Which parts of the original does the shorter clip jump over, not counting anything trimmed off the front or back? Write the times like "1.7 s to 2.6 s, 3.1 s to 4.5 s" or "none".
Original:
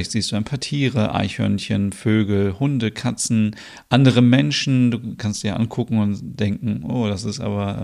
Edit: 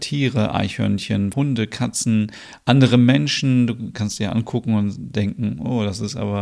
1.9 s to 2.6 s